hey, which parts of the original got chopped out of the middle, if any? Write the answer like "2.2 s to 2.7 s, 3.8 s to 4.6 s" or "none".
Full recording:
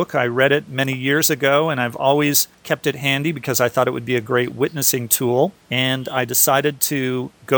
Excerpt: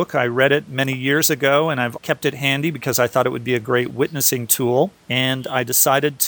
2.0 s to 2.6 s